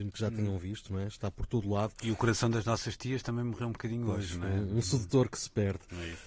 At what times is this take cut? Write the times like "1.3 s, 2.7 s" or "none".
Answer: none

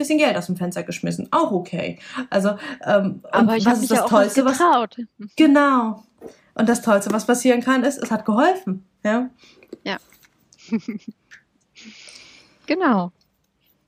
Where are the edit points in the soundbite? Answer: none

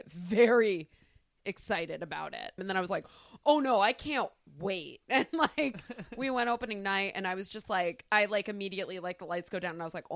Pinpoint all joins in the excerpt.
2.6 s

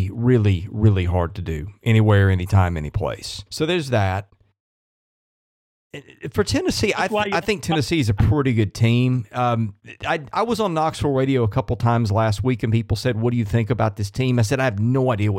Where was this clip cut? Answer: 3.5 s

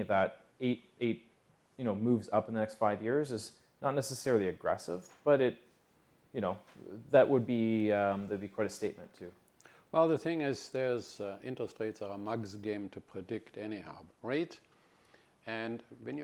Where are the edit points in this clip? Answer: 14.1 s

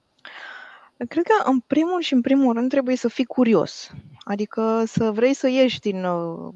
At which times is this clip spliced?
none

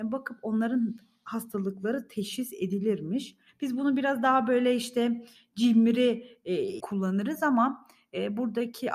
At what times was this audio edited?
3.5 s, 6.8 s

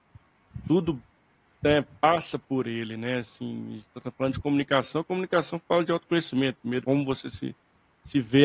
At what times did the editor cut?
6.8 s

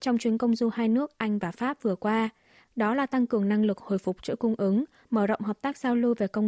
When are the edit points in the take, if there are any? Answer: none

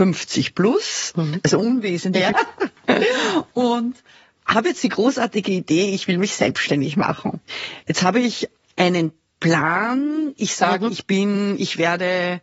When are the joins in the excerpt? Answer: 2.3 s

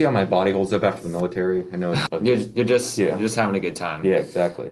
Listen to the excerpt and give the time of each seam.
2.1 s

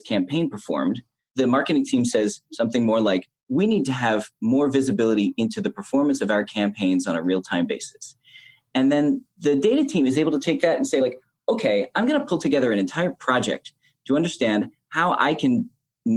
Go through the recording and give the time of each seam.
none

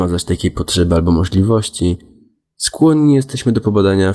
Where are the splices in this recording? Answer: none

